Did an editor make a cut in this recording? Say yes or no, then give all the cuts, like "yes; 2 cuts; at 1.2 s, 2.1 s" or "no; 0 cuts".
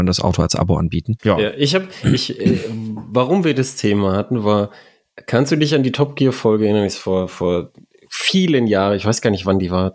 yes; 1 cut; at 1.2 s